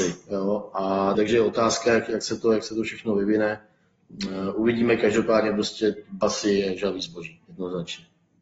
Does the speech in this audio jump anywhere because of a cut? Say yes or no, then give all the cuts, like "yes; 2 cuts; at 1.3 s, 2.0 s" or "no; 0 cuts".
yes; 1 cut; at 1.1 s